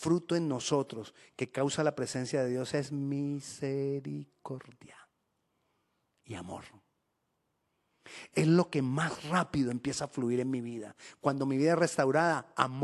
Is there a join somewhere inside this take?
no; 0 cuts

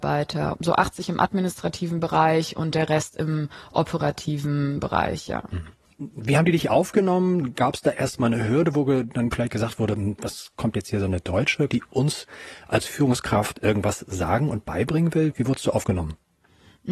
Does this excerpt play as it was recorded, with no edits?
no; 1 cut; at 11.7 s

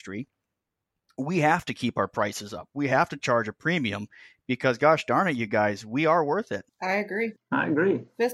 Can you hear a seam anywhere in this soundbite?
no; 0 cuts

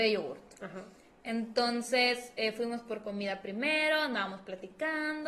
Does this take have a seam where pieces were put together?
no; 0 cuts

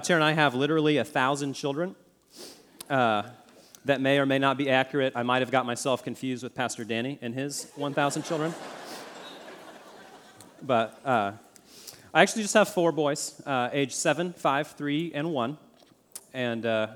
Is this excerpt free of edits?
yes; 0 cuts

